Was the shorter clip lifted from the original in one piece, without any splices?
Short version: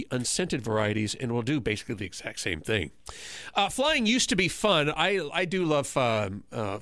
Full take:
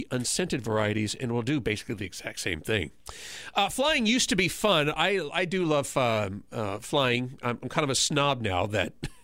yes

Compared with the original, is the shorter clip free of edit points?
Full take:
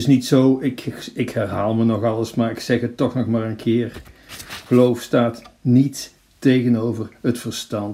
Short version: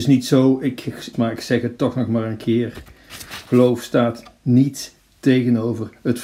no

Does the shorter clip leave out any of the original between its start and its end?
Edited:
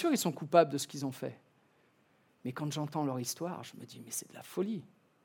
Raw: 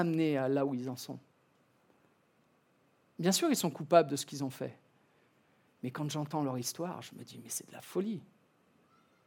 no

